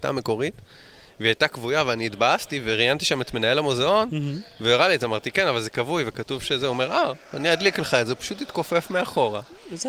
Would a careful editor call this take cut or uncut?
uncut